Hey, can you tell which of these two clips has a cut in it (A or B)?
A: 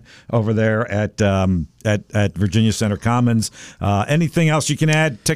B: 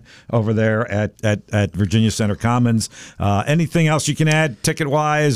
B